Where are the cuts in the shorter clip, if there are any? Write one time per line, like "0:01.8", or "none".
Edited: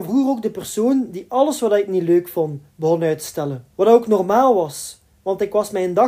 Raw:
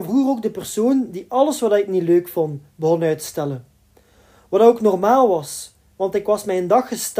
0:03.7